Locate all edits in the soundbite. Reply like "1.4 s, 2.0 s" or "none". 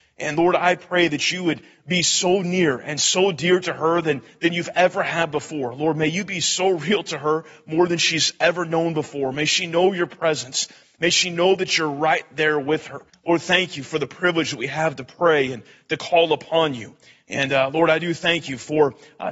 13.1 s